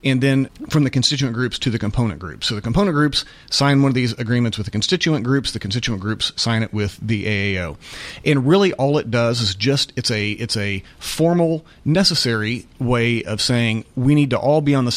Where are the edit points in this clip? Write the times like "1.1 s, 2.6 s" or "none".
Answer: none

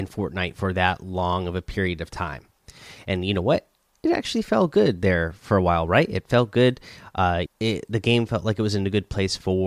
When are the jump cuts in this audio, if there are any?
7.5 s

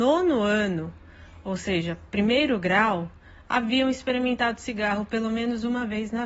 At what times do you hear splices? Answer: none

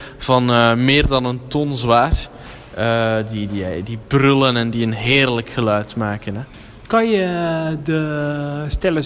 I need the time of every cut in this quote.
none

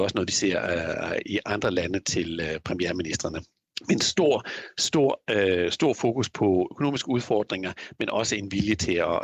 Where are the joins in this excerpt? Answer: none

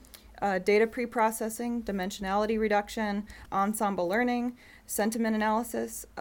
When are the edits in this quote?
3.5 s

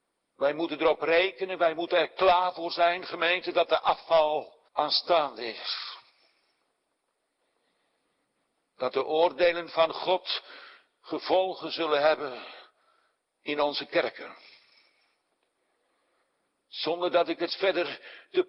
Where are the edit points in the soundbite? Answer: 4.7 s

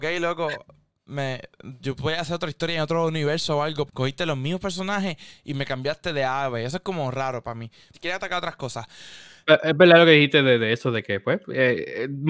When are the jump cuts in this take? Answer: 3.9 s, 7.9 s

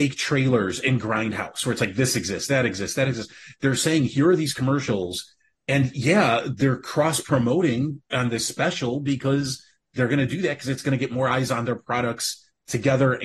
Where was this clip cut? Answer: none

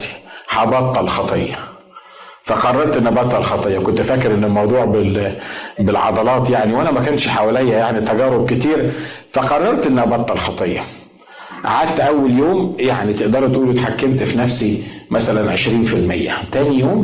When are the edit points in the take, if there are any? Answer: none

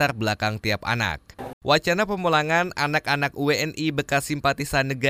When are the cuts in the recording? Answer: 1.5 s

